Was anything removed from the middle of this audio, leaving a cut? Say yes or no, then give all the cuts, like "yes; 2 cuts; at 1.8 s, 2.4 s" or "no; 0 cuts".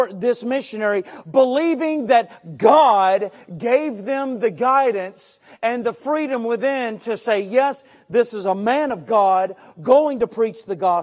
no; 0 cuts